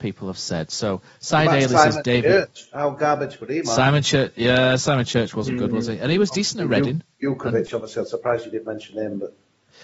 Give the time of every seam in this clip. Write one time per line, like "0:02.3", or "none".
none